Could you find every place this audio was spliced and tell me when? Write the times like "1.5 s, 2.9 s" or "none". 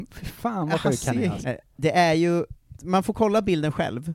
1.4 s, 2.7 s